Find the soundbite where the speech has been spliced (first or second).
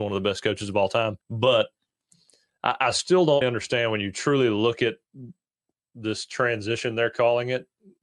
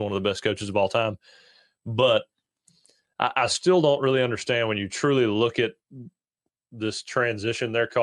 first